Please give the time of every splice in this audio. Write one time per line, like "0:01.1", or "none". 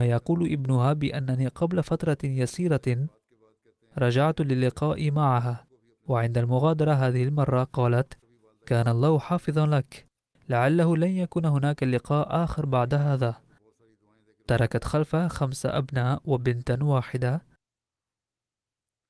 none